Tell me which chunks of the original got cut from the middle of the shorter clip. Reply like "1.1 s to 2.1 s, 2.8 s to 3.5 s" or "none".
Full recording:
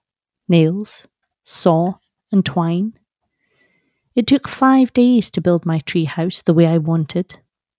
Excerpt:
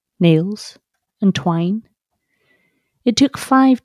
1.4 s to 2.2 s

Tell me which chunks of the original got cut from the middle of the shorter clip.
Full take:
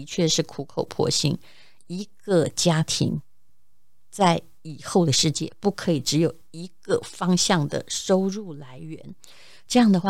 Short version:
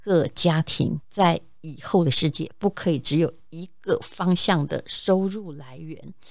3.2 s to 4.0 s

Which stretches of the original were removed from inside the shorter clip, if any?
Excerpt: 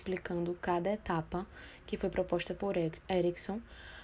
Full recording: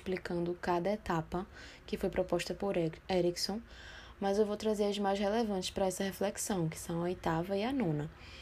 none

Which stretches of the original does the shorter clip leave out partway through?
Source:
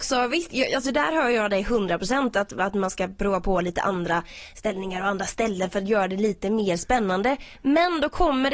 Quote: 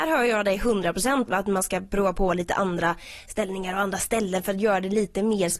2.3 s to 2.5 s

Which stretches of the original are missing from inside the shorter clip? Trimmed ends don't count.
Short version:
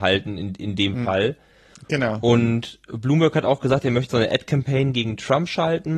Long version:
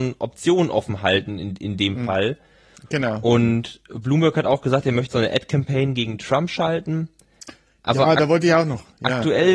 none

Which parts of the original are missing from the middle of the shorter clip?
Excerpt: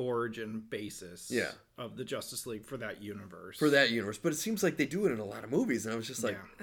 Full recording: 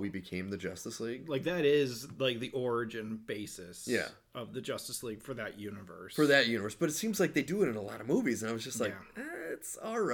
none

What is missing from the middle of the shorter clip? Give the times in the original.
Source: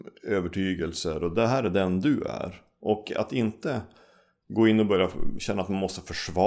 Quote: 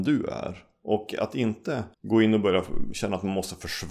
3.9 s to 4.4 s

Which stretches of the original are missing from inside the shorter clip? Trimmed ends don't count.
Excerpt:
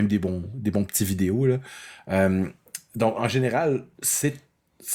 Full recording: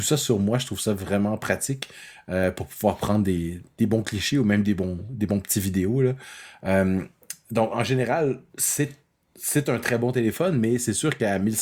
none

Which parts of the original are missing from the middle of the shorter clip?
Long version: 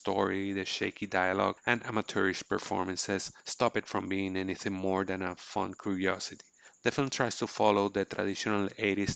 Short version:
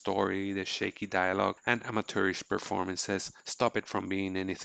none

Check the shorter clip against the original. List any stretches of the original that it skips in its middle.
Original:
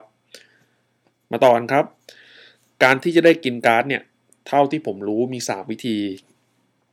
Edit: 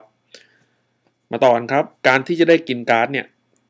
2.0 s to 2.7 s

